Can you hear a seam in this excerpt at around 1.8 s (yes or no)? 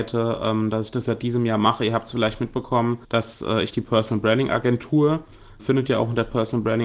no